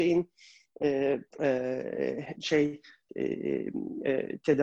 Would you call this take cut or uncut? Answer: cut